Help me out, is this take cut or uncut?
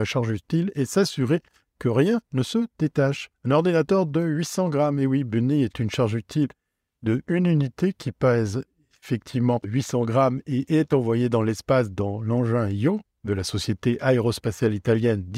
cut